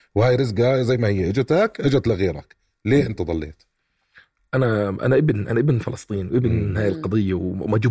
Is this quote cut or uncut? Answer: uncut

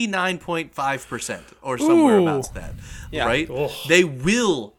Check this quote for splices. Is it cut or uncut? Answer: uncut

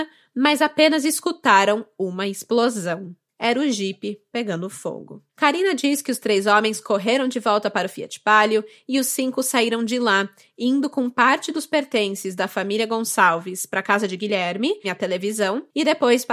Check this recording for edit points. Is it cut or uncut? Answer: cut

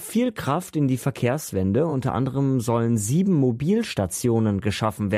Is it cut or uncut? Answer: uncut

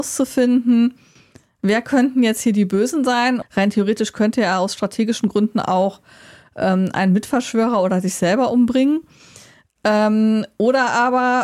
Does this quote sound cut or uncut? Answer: cut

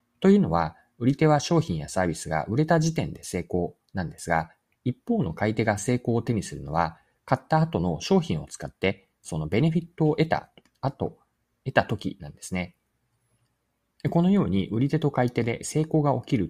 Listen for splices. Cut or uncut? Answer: uncut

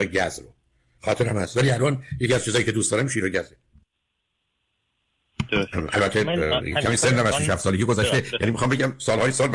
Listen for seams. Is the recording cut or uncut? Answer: uncut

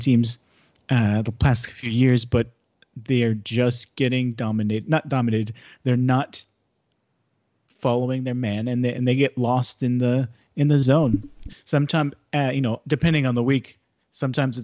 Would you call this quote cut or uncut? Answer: cut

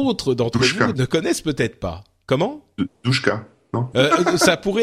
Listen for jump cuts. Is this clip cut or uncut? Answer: cut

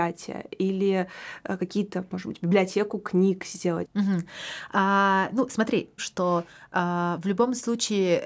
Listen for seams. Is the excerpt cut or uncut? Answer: cut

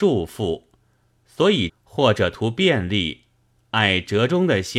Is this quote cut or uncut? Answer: cut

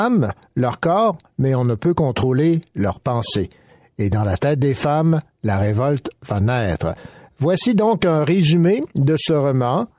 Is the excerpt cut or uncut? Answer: uncut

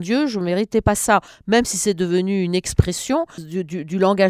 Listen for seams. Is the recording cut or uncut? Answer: cut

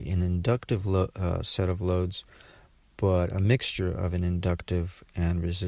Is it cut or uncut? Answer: uncut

